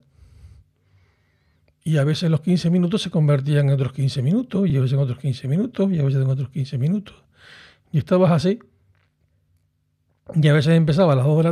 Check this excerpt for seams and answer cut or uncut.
uncut